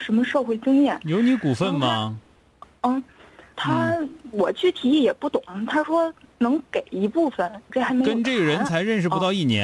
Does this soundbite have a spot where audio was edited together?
yes; 2 cuts; at 3.5 s, 7.7 s

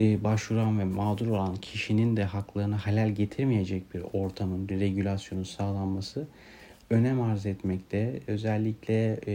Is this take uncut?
no; 1 cut; at 4.7 s

